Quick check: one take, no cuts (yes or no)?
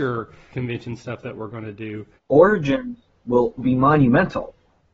no